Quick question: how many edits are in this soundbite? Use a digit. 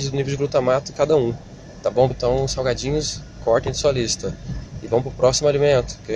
1